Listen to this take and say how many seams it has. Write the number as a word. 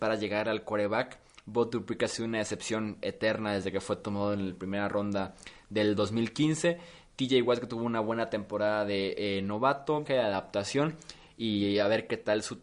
one